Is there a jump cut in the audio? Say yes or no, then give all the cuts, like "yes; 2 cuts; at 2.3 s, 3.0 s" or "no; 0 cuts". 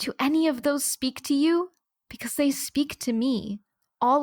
no; 0 cuts